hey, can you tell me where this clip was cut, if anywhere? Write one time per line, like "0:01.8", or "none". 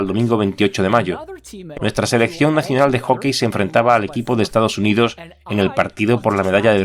0:01.7